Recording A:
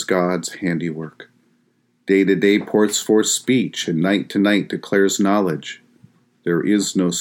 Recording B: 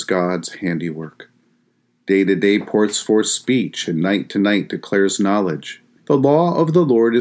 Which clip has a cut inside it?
B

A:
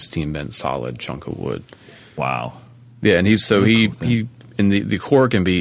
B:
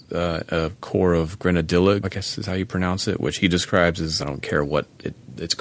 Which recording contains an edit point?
B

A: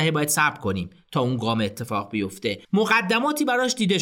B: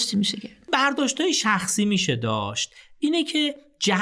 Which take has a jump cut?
A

